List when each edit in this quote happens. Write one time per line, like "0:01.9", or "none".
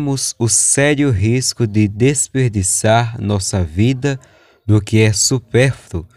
none